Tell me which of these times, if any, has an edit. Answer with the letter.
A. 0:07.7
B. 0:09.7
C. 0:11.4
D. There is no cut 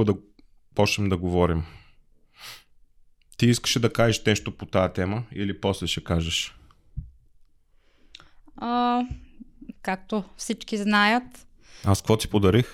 B